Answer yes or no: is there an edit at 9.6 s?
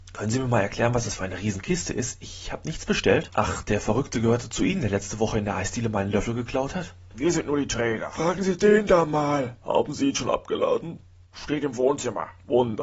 no